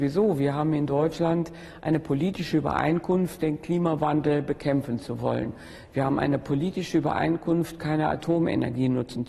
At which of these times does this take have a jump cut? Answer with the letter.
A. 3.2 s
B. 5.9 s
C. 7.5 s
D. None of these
D